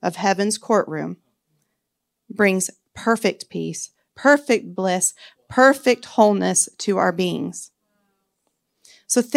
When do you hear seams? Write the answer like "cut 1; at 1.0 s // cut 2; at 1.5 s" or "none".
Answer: cut 1; at 4.1 s